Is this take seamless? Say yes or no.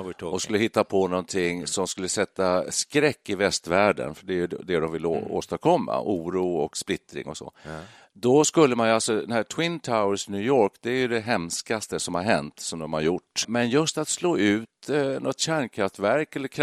no